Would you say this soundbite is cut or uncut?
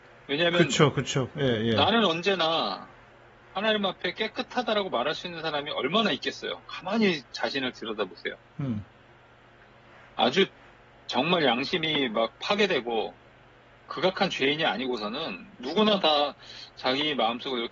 uncut